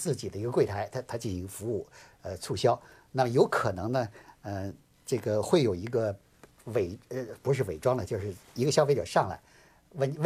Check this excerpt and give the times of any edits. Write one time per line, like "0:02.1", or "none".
none

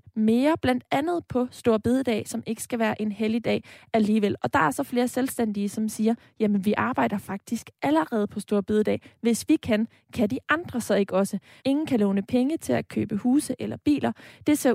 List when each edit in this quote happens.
0:11.6

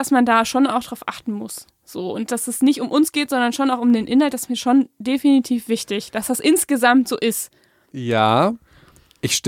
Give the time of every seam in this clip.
0:07.9

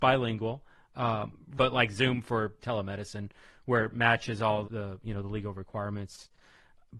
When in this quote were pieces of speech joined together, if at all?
0:01.6
0:04.6

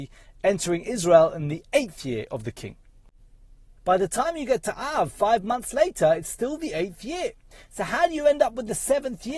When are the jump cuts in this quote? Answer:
0:03.8

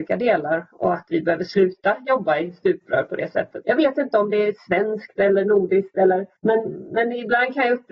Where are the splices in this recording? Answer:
0:03.6
0:06.4

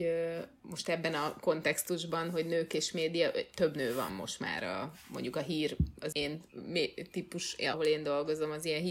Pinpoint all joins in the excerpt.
0:06.1
0:07.7

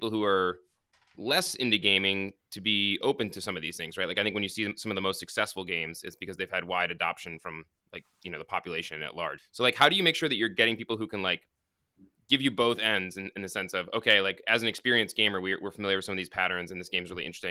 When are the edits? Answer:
0:09.4

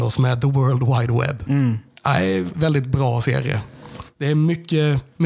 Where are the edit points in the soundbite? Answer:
0:02.5

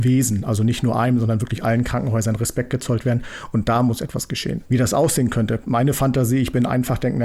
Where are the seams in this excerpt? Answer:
none

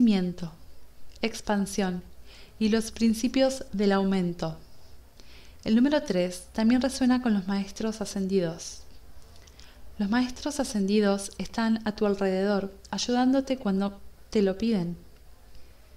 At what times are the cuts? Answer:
none

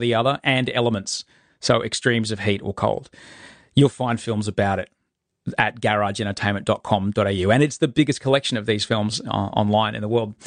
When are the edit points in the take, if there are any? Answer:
none

